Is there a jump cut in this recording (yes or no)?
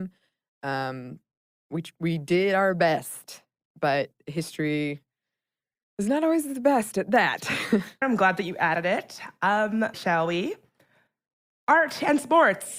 yes